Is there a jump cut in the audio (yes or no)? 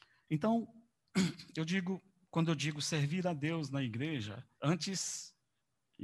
yes